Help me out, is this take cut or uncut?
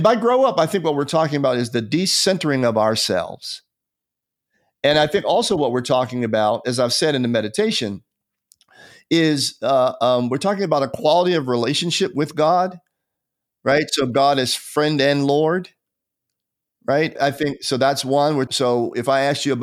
cut